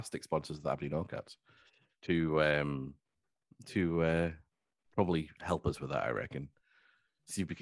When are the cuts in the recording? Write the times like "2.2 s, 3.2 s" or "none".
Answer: none